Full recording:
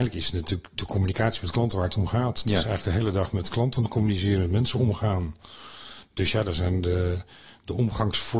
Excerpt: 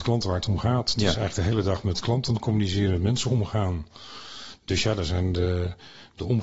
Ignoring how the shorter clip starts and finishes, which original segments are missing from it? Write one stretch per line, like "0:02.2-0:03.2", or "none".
none

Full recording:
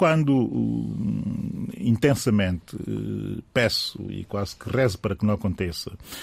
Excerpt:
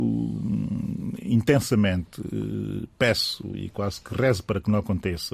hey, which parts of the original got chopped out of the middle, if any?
none

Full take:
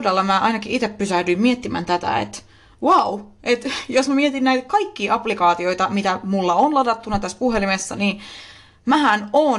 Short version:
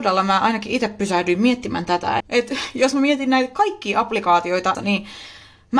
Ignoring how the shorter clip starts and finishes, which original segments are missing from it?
0:02.2-0:03.3
0:05.9-0:07.9

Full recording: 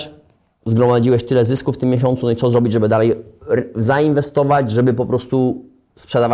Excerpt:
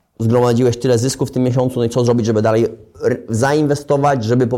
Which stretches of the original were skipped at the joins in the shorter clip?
none

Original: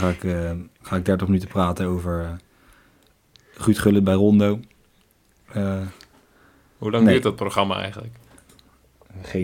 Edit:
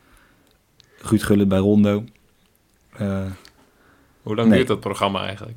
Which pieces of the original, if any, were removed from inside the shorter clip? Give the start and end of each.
none

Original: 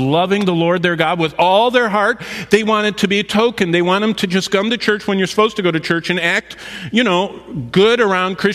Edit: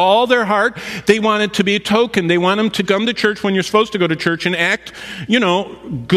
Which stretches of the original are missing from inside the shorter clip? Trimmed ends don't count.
0:04.3-0:04.5

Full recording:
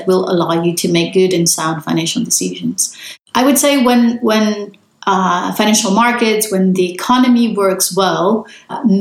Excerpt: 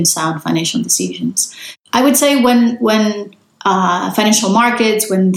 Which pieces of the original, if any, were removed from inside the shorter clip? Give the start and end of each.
none

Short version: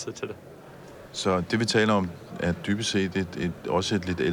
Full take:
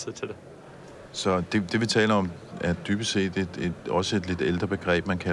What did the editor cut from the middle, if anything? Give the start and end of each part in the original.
0:01.5-0:01.7

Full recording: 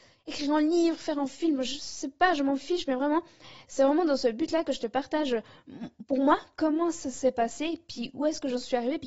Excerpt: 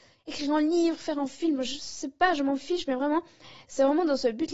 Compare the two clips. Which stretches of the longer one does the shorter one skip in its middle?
none

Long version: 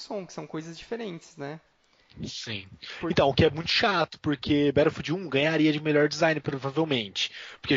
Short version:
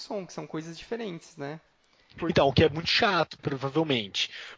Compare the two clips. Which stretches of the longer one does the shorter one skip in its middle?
0:02.2-0:03.0
0:04.2-0:06.4

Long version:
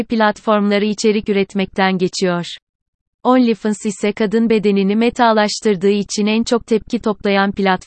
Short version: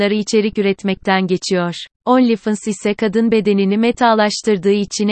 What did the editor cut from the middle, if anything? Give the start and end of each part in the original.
0:02.6-0:03.1

